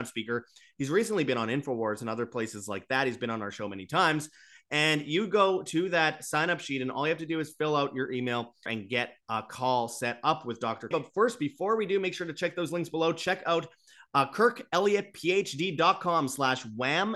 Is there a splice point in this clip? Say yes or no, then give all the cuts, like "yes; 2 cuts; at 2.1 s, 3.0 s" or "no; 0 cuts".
yes; 2 cuts; at 8.7 s, 10.9 s